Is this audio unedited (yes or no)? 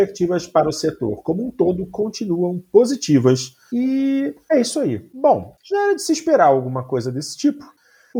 no